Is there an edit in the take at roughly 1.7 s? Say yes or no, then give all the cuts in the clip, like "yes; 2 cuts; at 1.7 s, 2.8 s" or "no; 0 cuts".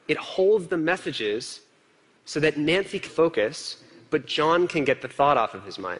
no; 1 cut; at 3.1 s